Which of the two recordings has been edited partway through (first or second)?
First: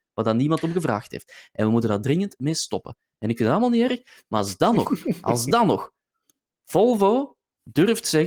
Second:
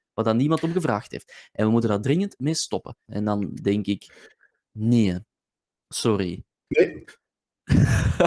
second